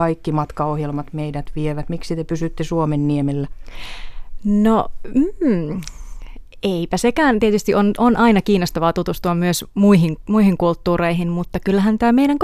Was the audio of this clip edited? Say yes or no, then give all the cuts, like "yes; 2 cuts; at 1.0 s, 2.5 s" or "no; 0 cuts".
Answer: no; 0 cuts